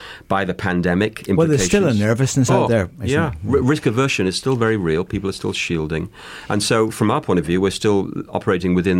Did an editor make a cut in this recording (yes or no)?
no